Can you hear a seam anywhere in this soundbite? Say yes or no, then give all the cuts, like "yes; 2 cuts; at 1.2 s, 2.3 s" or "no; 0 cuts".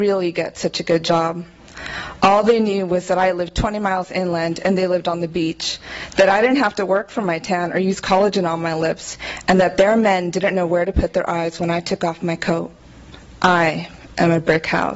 no; 0 cuts